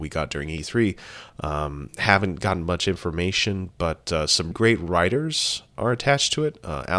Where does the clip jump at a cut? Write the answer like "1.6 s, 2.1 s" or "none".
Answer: 1.3 s, 4.5 s